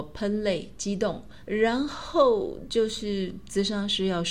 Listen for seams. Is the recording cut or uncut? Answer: cut